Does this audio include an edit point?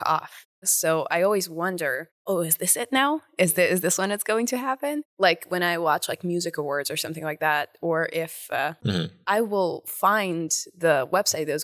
yes; 2 cuts; at 5.1 s, 8.8 s

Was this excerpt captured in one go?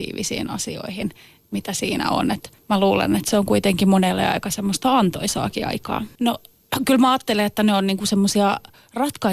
no; 1 cut; at 6.2 s

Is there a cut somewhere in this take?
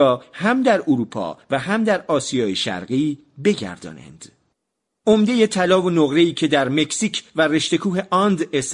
no; 0 cuts

